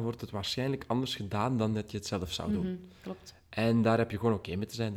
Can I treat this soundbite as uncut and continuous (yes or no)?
yes